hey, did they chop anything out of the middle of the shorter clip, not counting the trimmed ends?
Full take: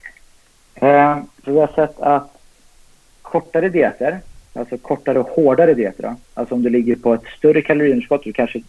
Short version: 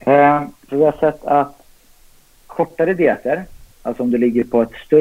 yes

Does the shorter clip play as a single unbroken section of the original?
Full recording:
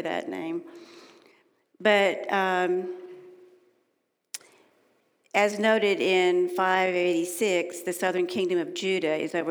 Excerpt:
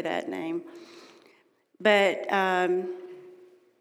yes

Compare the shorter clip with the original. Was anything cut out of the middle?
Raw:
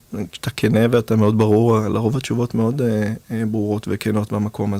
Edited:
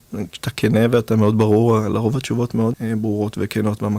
yes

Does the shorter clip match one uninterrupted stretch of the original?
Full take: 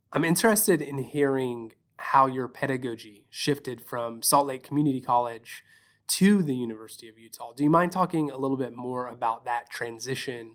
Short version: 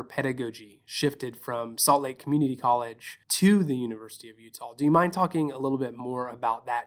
no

